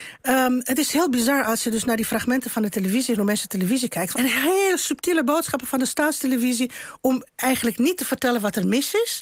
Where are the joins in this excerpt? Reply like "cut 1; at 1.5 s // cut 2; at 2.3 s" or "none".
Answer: cut 1; at 4.1 s